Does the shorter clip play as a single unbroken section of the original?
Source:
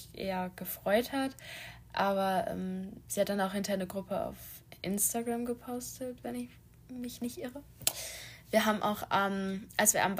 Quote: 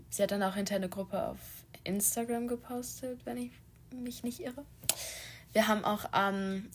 yes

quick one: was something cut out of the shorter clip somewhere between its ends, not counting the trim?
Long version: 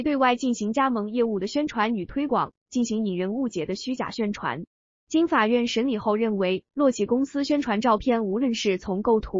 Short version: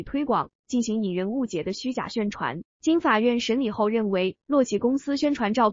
yes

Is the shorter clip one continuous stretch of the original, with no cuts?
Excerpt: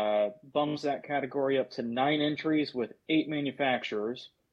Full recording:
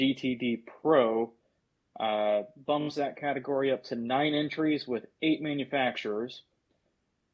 yes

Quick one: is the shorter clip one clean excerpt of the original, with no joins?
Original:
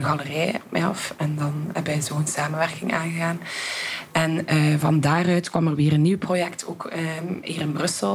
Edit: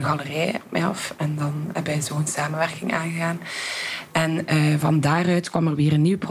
yes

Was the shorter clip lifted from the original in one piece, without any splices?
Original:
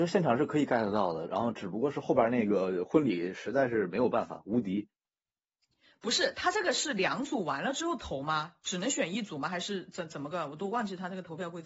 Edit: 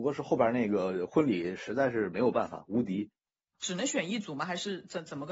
no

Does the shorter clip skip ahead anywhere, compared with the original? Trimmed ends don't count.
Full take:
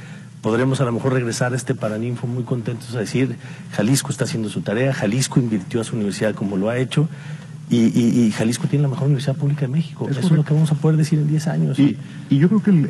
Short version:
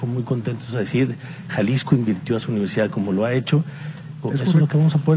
yes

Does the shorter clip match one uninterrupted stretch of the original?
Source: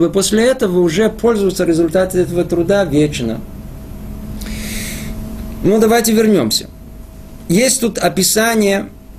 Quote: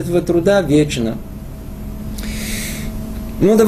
yes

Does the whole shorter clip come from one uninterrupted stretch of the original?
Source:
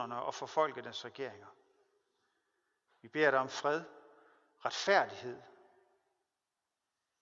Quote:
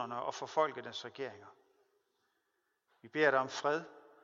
yes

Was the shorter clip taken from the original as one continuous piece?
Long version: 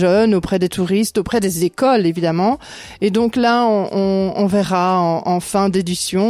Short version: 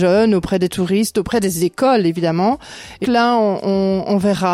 no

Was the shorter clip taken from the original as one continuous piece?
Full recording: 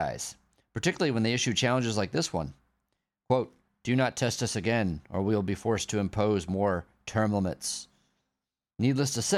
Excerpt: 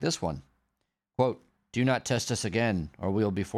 yes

